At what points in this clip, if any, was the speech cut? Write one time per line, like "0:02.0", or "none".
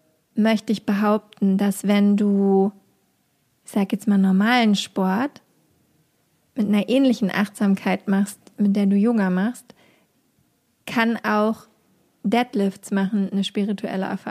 none